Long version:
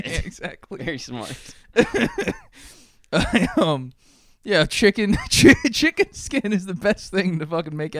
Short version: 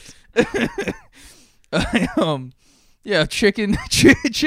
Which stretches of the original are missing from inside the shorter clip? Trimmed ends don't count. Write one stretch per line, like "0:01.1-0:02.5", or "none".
none